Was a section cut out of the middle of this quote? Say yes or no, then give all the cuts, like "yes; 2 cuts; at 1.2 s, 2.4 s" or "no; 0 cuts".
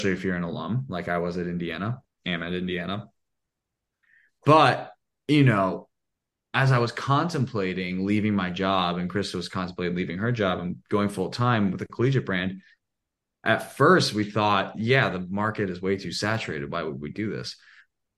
no; 0 cuts